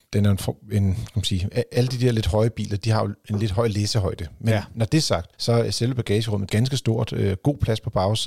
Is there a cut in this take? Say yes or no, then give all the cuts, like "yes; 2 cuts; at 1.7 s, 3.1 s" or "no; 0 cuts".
yes; 2 cuts; at 5.3 s, 6.5 s